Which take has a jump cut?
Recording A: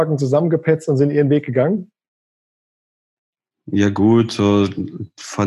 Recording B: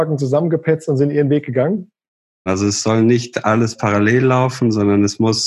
B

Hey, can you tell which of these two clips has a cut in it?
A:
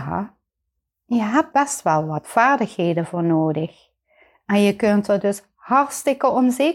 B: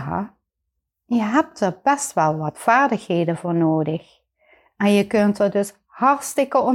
A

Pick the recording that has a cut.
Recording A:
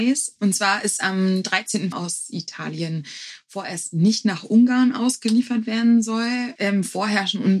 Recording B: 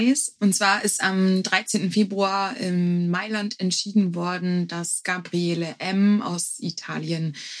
A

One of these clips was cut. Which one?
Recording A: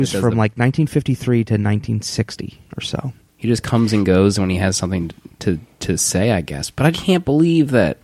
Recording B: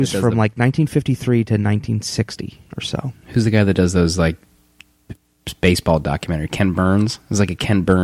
A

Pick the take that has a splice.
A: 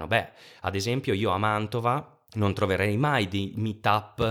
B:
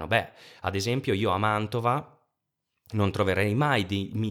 A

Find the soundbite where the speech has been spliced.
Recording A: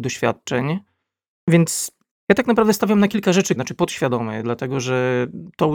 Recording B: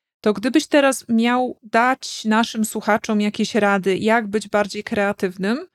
A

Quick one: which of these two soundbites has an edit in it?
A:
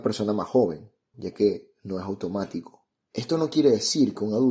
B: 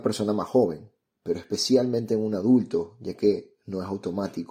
A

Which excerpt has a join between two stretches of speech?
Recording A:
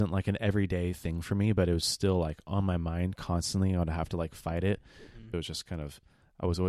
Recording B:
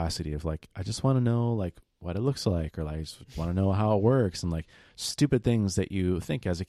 A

